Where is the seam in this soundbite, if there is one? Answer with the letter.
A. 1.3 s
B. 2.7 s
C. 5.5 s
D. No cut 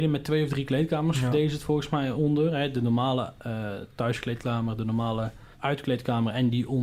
C